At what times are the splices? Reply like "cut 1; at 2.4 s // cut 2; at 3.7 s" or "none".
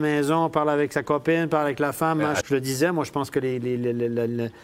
cut 1; at 2.4 s